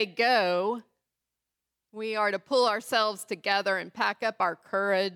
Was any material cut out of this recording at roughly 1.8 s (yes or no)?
no